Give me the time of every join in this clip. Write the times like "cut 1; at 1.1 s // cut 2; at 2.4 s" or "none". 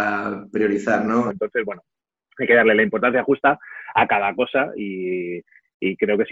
cut 1; at 1.3 s